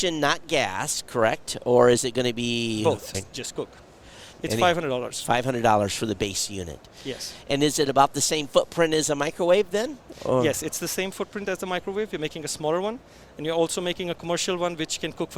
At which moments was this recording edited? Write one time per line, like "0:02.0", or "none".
0:03.1
0:04.3